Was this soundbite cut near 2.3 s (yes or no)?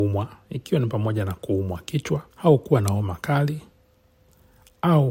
yes